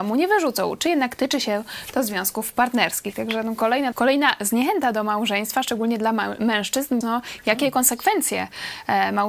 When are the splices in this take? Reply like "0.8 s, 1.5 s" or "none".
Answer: 3.9 s, 7.0 s